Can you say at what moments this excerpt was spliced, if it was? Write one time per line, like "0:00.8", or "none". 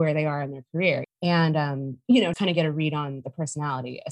0:01.0
0:02.3